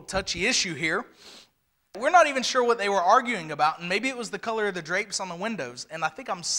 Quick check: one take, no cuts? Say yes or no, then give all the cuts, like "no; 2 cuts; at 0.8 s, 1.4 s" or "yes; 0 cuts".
no; 1 cut; at 1.9 s